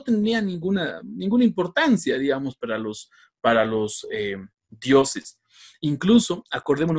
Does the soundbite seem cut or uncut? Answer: uncut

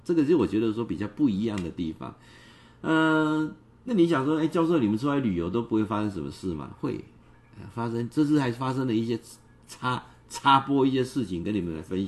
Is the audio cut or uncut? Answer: uncut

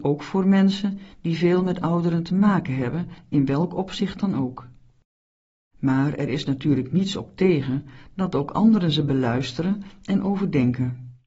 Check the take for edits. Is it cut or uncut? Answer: uncut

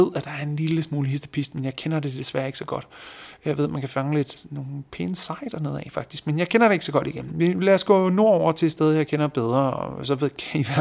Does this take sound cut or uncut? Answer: uncut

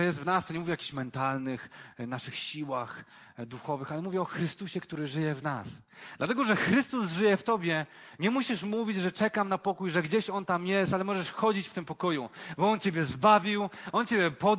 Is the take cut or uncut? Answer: uncut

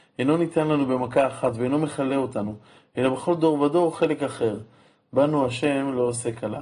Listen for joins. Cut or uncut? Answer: uncut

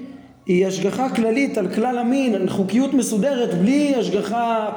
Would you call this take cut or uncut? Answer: uncut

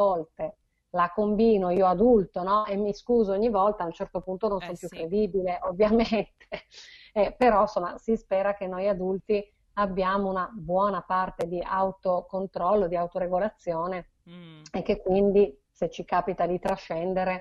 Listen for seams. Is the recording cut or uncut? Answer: uncut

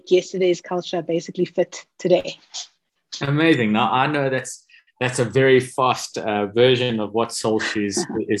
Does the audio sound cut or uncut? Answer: uncut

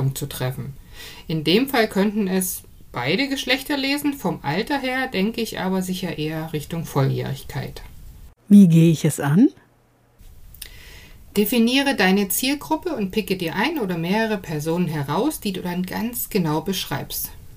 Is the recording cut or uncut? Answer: cut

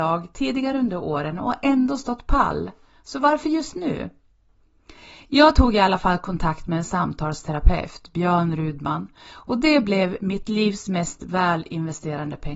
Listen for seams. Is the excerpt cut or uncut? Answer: uncut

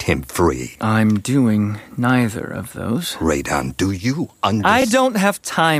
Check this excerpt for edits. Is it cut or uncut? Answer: uncut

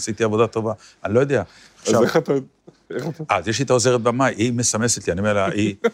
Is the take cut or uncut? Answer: uncut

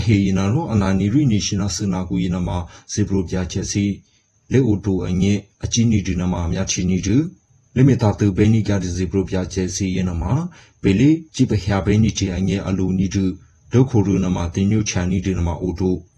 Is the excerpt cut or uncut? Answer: uncut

